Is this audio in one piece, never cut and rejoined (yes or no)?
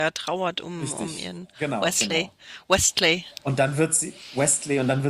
yes